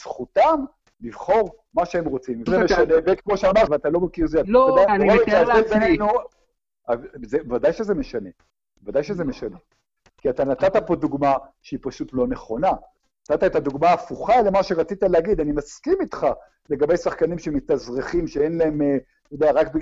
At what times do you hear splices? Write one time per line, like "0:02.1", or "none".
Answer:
0:02.5
0:03.7
0:04.9